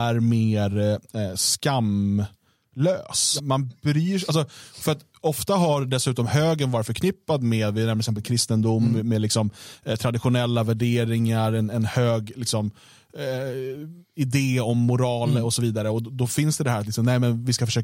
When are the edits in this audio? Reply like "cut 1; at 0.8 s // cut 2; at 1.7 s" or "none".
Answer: cut 1; at 3.4 s